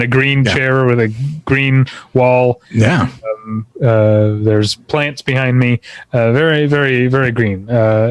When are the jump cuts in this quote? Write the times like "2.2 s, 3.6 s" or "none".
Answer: 2.6 s